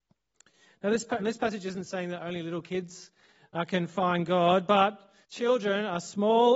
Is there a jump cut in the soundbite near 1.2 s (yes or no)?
yes